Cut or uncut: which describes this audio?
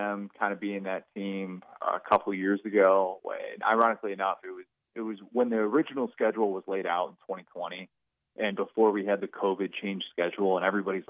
cut